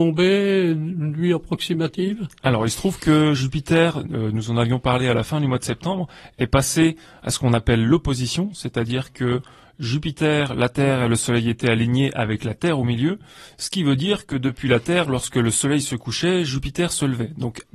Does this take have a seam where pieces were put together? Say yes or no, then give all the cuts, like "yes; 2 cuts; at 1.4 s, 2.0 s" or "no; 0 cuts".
no; 0 cuts